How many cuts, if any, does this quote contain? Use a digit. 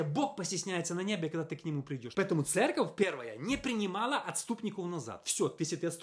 1